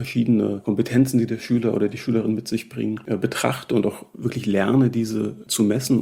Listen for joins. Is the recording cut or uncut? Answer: uncut